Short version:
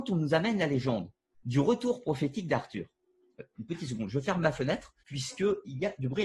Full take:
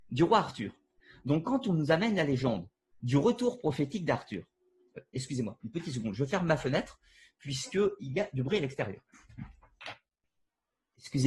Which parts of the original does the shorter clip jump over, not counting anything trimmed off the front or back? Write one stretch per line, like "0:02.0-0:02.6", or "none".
0:05.1-0:05.6
0:07.0-0:07.3